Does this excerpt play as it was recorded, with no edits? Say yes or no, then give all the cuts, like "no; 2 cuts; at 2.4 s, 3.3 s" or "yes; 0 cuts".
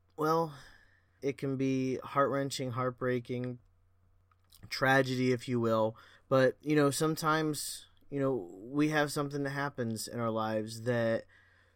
no; 2 cuts; at 1.2 s, 6.1 s